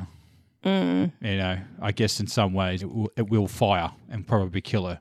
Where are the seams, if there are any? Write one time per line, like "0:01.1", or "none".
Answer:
0:02.8